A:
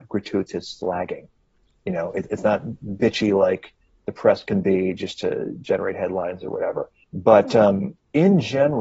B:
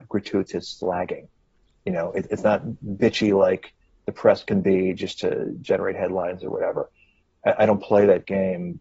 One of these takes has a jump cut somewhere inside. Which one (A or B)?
A